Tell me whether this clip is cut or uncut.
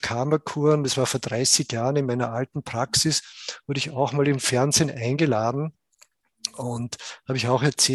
uncut